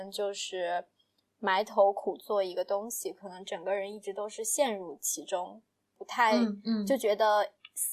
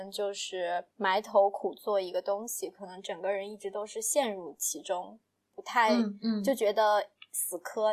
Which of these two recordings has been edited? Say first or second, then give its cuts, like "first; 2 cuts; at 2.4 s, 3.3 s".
second; 1 cut; at 0.9 s